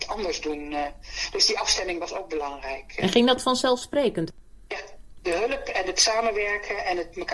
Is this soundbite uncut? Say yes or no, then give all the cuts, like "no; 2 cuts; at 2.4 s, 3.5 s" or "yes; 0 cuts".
yes; 0 cuts